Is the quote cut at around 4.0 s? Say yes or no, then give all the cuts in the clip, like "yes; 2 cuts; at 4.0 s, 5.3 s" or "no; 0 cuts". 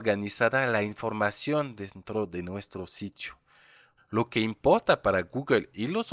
yes; 1 cut; at 4.0 s